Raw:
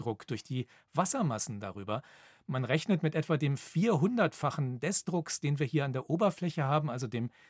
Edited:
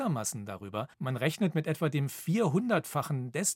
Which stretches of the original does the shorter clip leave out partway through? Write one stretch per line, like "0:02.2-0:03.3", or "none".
0:02.1-0:02.4